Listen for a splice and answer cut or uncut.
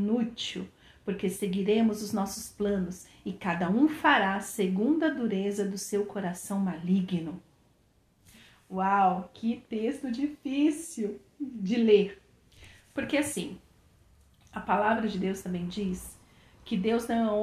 uncut